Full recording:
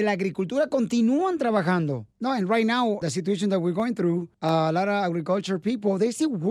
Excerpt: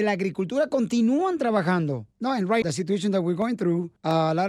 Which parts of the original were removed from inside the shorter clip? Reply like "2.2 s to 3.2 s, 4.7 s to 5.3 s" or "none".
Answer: 2.6 s to 3.0 s